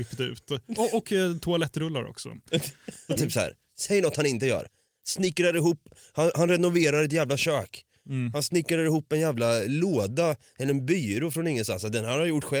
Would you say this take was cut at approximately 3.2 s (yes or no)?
yes